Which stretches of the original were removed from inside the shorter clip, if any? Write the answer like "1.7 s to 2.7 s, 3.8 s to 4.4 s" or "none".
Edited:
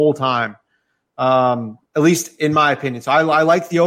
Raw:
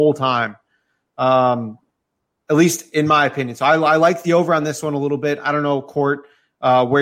1.9 s to 2.4 s